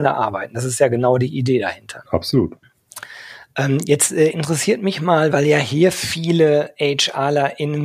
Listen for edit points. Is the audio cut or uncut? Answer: cut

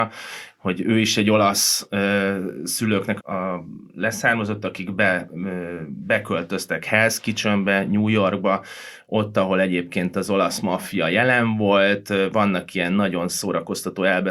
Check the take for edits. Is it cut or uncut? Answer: cut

